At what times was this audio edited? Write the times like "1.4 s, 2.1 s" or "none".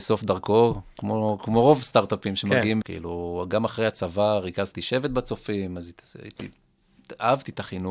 2.8 s